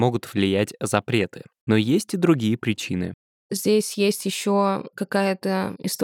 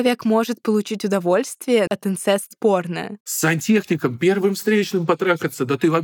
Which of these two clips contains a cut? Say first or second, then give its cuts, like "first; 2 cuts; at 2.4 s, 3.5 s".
second; 2 cuts; at 1.9 s, 3.2 s